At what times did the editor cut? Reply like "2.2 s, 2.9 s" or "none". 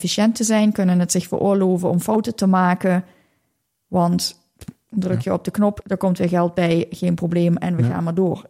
5.8 s